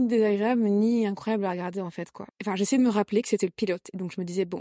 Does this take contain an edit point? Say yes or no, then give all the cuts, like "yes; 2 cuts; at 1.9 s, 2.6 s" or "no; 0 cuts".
yes; 1 cut; at 2.3 s